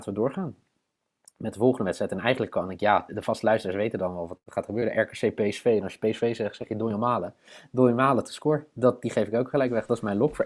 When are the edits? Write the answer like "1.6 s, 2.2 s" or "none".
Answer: 3.1 s